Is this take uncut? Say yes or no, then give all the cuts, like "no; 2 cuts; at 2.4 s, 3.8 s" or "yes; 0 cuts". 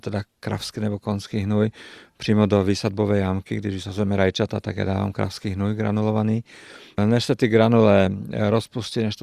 no; 1 cut; at 7.0 s